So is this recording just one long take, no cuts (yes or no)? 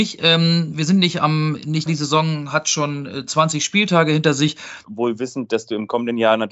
no